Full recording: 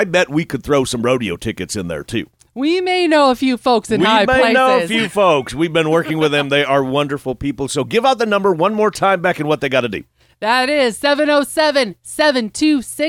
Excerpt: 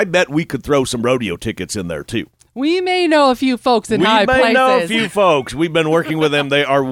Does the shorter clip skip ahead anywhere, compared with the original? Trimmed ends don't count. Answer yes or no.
no